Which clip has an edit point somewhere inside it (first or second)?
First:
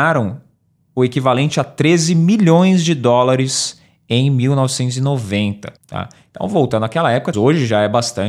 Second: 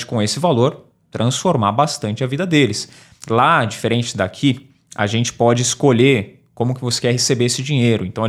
first